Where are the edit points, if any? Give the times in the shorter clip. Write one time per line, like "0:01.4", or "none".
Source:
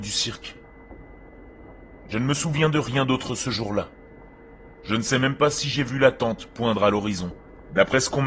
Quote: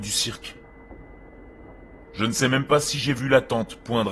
0:02.0